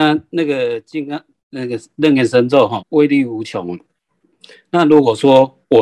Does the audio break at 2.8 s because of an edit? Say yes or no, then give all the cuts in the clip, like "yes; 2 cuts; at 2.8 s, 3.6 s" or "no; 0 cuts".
yes; 1 cut; at 2.8 s